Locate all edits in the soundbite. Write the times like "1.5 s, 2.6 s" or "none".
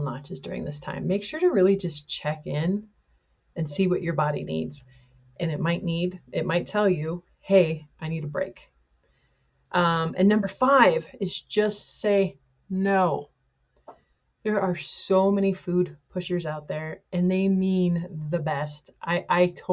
none